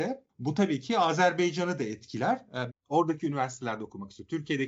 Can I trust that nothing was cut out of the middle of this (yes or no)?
no